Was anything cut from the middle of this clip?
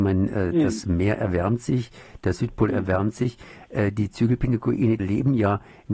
yes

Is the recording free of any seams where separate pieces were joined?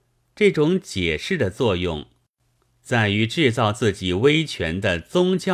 yes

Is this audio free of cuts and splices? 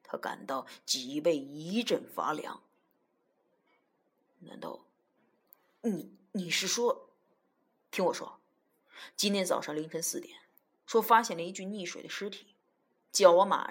no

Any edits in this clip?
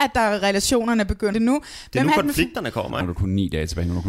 yes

